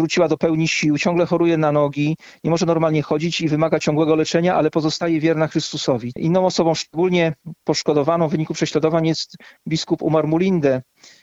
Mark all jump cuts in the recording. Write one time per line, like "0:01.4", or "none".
0:06.1